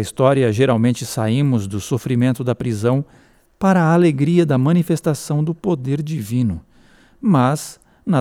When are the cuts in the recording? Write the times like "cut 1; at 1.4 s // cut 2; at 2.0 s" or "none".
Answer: none